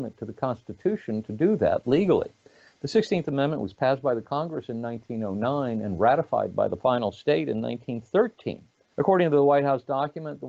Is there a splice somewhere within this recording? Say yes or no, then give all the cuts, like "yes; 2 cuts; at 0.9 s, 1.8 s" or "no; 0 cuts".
yes; 1 cut; at 8.9 s